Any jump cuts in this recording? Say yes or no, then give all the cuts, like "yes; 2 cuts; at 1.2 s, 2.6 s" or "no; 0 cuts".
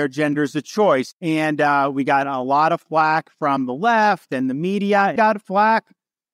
yes; 1 cut; at 5.2 s